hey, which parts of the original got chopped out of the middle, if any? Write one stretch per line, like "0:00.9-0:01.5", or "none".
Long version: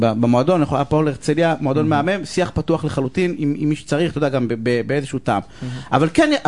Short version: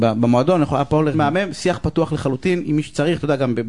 0:01.1-0:01.9
0:03.4-0:03.6